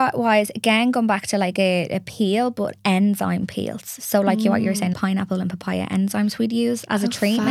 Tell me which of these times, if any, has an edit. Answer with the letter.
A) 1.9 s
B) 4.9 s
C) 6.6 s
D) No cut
B